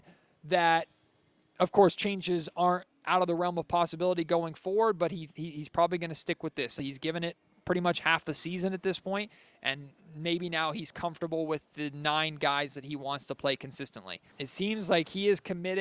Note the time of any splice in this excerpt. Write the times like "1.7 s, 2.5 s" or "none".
6.8 s, 14.3 s